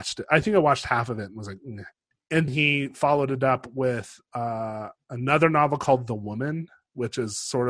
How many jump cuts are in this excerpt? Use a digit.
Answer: 1